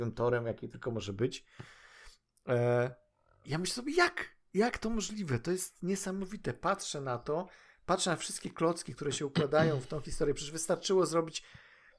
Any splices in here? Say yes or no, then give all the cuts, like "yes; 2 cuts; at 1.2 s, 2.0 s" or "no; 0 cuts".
no; 0 cuts